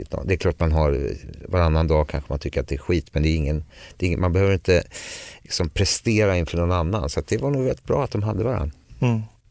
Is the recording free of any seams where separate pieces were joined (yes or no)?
yes